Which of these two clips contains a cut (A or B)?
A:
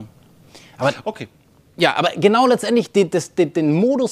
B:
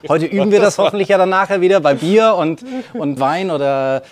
B